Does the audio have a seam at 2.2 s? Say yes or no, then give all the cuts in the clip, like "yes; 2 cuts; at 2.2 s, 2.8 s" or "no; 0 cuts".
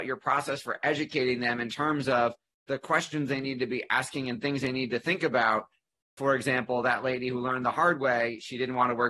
no; 1 cut; at 6.2 s